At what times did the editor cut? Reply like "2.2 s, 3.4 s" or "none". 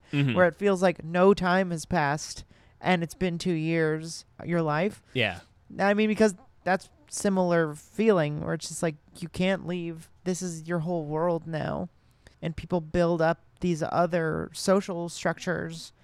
4.4 s, 12.3 s